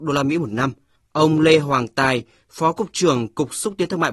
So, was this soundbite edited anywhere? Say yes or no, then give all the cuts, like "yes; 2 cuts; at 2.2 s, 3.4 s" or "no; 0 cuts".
yes; 1 cut; at 1.0 s